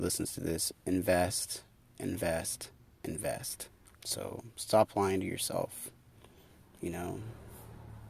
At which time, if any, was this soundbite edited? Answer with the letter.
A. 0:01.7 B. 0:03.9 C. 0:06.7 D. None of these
B